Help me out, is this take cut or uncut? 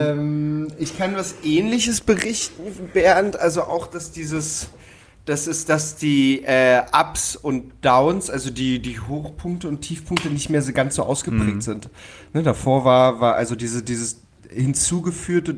uncut